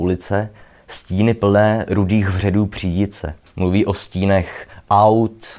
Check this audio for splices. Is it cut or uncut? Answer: cut